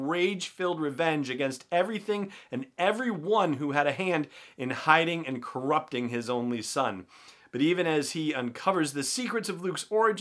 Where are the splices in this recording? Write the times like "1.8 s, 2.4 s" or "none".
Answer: none